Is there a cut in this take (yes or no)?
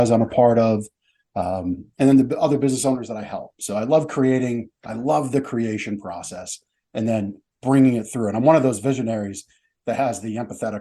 no